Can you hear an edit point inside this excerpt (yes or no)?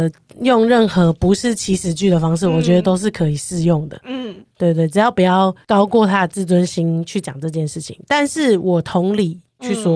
no